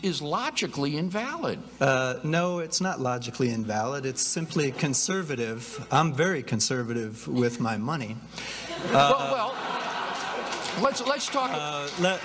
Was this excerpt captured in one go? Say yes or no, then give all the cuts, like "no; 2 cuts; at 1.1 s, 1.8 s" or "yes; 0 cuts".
yes; 0 cuts